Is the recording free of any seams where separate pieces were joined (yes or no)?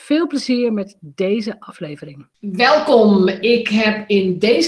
no